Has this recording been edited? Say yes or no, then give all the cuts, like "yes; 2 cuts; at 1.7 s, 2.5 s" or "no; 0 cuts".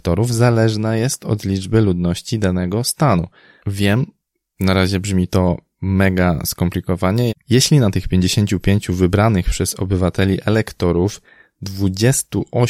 yes; 2 cuts; at 3.6 s, 7.3 s